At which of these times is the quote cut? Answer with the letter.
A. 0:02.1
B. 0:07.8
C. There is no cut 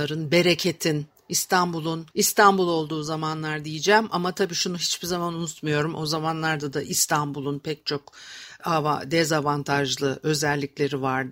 A